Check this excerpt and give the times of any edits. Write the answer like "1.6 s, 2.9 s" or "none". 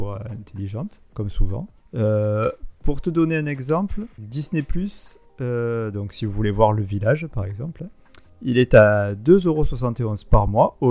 none